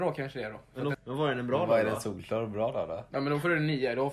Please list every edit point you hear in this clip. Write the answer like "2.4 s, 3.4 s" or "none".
0.9 s